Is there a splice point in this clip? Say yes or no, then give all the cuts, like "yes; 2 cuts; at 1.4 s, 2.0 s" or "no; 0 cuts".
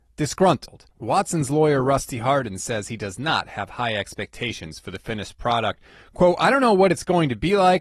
yes; 1 cut; at 0.9 s